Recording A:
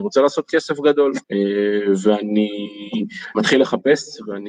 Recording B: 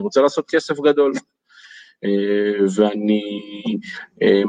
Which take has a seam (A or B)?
A